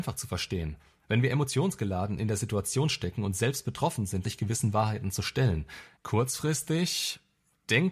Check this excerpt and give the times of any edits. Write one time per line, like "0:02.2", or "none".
0:04.2
0:05.9